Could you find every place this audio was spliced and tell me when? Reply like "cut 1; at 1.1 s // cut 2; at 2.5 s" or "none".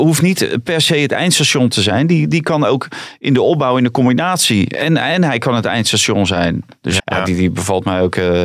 cut 1; at 7.0 s

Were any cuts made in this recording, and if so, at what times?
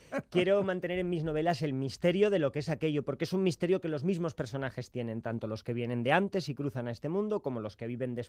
none

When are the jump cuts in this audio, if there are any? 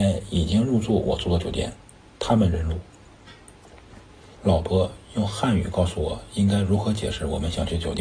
cut 1; at 4.4 s

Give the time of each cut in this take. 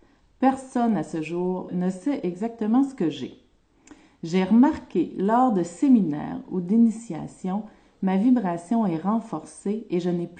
cut 1; at 1.7 s

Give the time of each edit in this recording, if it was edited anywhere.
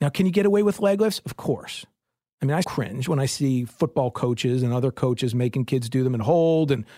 cut 1; at 2.6 s

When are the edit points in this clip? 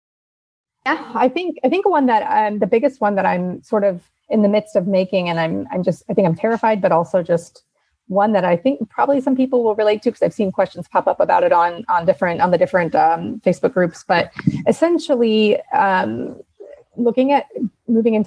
none

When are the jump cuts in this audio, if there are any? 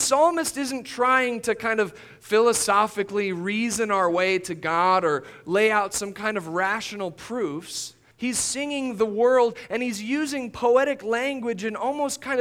cut 1; at 8.1 s

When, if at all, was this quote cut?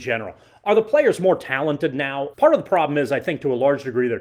cut 1; at 2.3 s

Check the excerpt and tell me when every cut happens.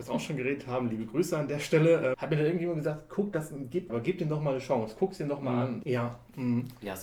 cut 1; at 2.1 s // cut 2; at 3.9 s // cut 3; at 5.8 s

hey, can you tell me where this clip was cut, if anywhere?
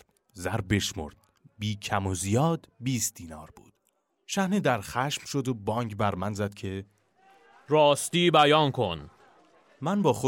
none

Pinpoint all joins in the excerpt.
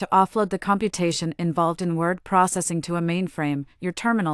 none

